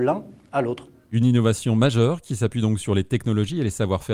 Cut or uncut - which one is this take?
uncut